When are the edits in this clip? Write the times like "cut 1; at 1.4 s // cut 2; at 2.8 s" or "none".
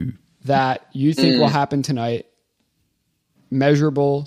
none